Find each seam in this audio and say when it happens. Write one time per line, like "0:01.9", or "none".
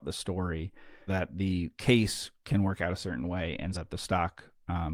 0:01.1
0:03.7